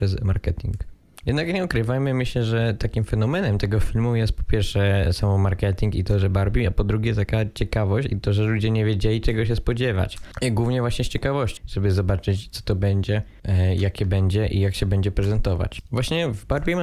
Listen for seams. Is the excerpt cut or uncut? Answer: cut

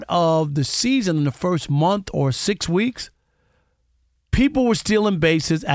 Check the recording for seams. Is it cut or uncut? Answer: uncut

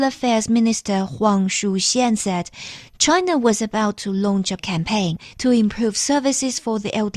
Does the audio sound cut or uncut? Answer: uncut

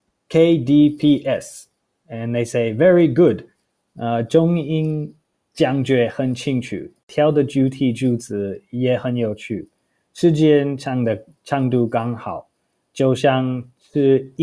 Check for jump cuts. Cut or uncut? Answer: uncut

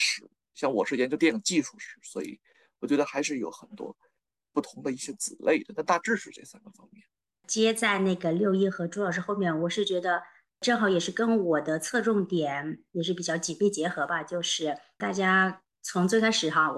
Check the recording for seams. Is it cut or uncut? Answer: uncut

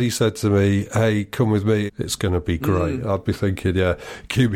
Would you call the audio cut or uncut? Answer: cut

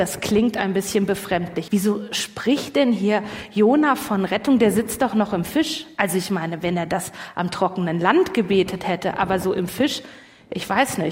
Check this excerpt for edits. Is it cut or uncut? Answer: cut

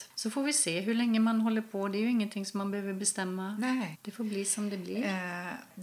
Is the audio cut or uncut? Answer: cut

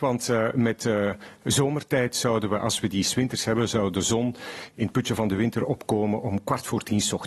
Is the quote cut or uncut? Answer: uncut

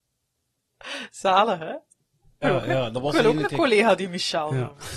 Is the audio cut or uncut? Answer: cut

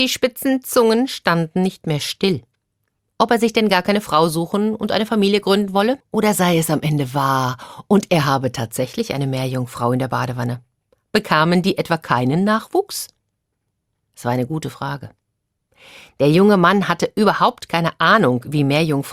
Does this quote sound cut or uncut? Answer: cut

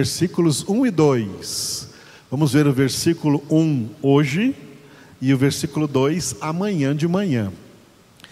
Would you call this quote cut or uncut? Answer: uncut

